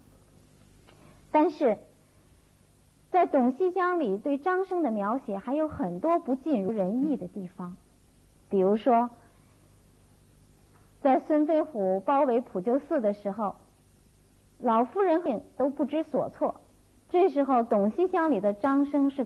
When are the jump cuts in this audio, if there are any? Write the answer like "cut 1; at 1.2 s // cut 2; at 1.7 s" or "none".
cut 1; at 8.4 s // cut 2; at 15.3 s

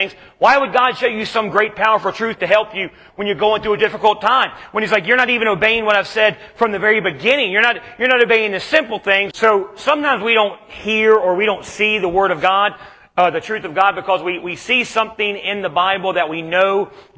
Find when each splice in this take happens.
cut 1; at 9.3 s

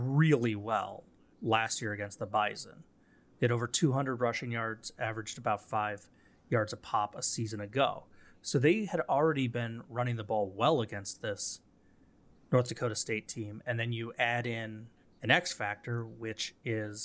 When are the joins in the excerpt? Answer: none

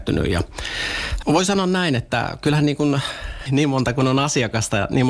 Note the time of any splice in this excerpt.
cut 1; at 1.2 s // cut 2; at 3.5 s

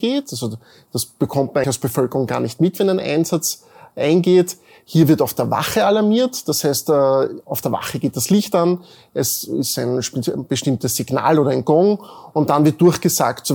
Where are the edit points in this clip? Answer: cut 1; at 1.6 s

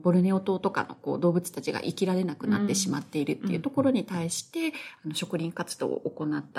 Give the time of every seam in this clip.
none

